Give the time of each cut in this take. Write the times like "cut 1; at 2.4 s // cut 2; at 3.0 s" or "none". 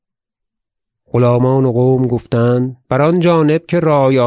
cut 1; at 2.8 s